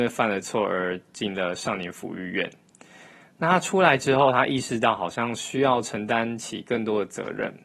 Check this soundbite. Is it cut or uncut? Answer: uncut